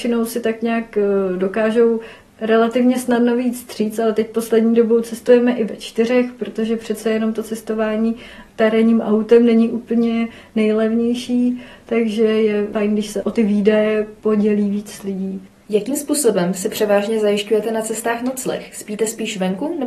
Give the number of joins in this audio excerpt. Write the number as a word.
zero